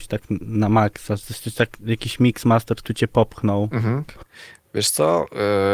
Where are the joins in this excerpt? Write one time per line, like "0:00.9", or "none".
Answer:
0:04.1